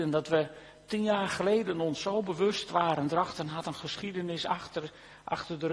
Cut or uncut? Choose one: uncut